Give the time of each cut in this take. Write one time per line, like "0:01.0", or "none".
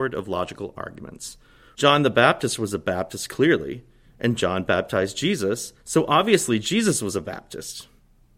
0:01.8
0:05.8